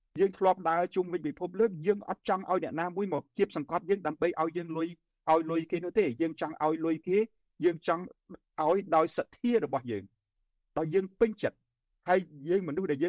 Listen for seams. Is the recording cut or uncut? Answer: uncut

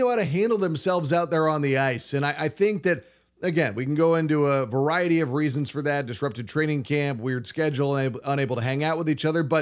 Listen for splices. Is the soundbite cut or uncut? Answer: uncut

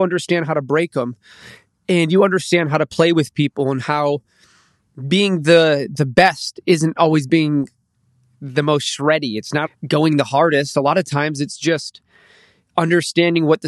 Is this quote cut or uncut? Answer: cut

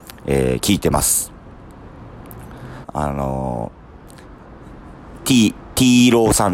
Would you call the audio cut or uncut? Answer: cut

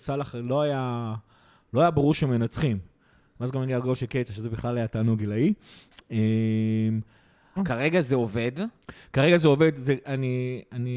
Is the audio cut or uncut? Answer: cut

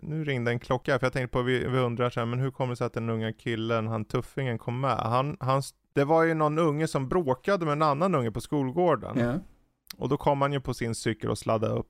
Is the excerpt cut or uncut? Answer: uncut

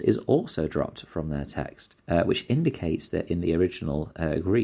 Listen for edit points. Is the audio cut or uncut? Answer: cut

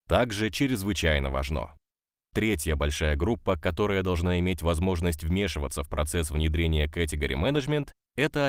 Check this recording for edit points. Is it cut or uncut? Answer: uncut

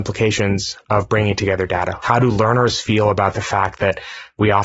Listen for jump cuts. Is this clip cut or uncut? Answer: cut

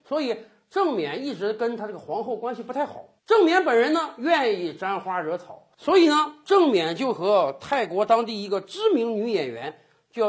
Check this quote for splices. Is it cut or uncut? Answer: cut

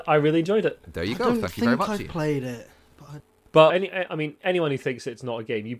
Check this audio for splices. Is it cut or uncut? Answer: cut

